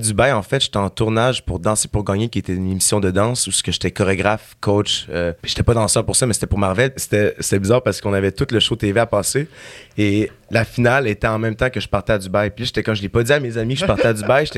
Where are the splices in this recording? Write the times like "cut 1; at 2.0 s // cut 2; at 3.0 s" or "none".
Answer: cut 1; at 5.4 s // cut 2; at 7.0 s